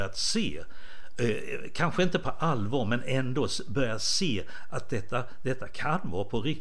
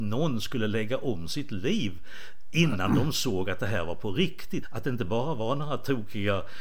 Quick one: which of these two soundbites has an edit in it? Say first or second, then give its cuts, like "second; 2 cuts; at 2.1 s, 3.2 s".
second; 1 cut; at 4.6 s